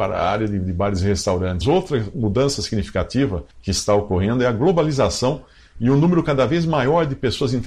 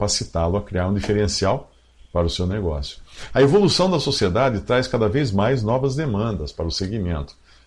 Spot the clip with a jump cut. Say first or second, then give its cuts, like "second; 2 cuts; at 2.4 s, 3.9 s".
first; 2 cuts; at 1.6 s, 3.5 s